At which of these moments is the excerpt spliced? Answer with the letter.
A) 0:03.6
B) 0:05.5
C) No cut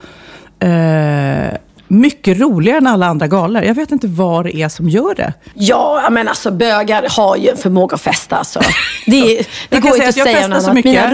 B